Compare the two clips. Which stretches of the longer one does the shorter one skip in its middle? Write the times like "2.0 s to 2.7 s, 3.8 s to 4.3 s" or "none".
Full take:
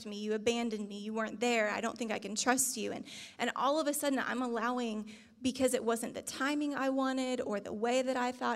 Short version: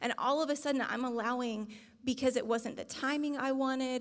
none